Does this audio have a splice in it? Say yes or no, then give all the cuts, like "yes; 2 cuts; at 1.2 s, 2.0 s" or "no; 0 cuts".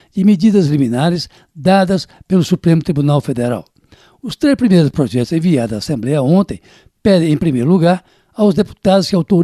no; 0 cuts